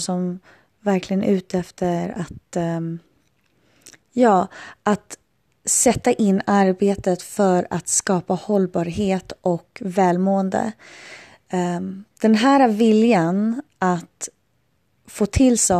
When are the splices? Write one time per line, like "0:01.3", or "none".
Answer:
none